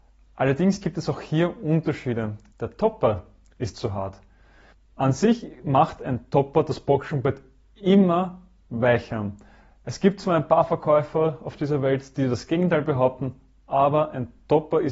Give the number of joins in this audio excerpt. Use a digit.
1